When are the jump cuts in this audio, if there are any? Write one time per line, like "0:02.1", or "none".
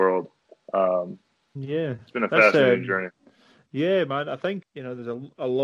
0:01.6
0:04.6